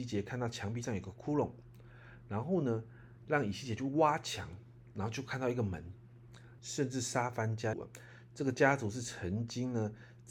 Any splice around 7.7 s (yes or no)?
yes